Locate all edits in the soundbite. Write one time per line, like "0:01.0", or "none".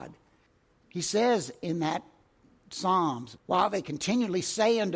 0:03.4